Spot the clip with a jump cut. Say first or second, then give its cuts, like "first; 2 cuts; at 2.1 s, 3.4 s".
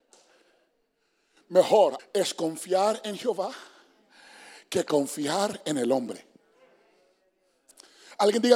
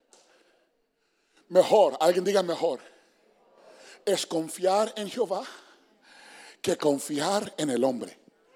first; 1 cut; at 2.0 s